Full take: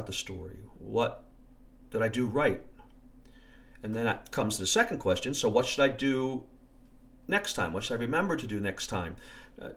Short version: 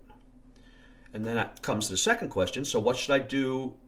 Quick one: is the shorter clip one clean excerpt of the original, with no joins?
yes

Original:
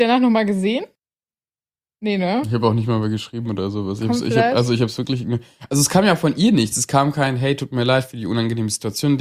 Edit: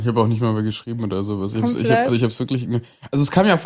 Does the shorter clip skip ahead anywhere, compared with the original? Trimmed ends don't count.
yes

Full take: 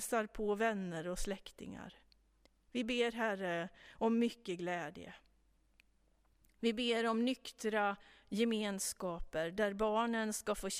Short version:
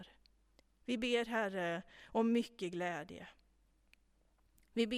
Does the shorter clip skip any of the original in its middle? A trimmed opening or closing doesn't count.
no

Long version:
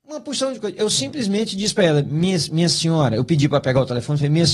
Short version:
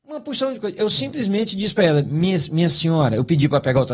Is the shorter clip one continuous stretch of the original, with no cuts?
yes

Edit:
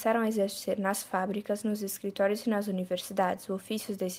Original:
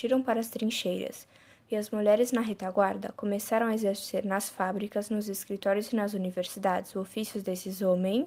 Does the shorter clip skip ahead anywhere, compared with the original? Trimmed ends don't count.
no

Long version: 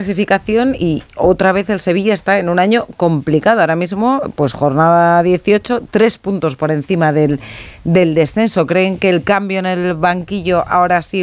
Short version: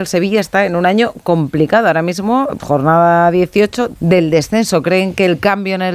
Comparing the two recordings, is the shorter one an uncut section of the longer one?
no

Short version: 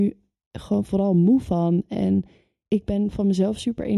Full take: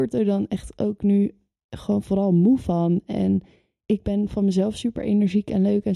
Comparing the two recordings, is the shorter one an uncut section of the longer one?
yes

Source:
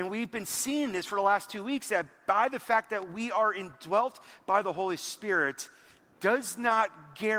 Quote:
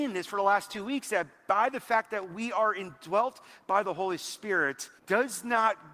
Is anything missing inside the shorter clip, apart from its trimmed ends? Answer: yes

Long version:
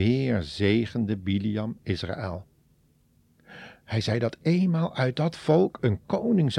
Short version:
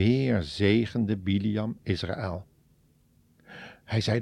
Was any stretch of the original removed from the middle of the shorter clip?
no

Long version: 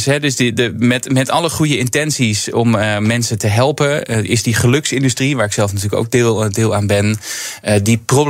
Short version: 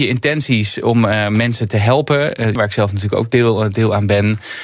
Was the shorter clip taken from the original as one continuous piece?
no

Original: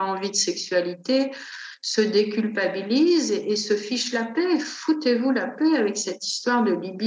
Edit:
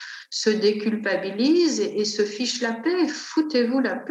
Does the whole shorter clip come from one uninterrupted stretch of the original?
yes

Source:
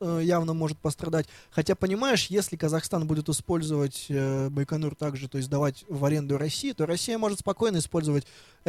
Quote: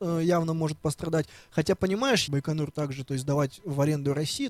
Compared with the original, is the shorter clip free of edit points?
no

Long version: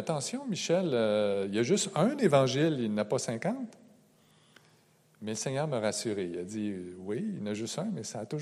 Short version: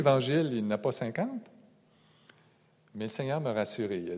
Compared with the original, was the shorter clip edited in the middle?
no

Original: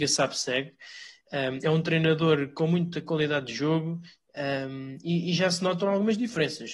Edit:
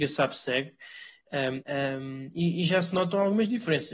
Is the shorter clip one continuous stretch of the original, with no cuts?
no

